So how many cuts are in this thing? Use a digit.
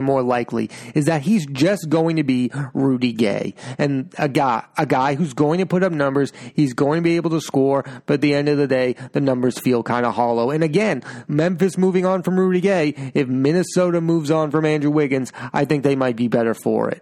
1